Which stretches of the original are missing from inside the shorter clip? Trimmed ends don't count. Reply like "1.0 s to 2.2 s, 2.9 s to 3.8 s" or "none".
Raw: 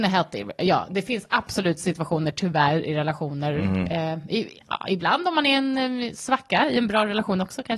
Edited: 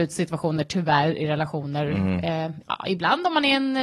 4.3 s to 4.6 s